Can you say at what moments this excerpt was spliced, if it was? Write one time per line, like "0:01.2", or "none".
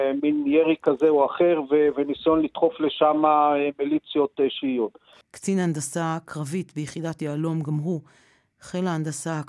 0:05.2